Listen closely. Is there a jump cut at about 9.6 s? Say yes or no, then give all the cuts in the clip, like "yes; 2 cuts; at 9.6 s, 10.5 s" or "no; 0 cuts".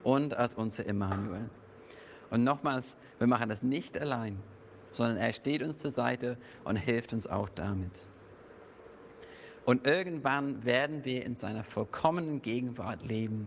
yes; 2 cuts; at 2.3 s, 9.6 s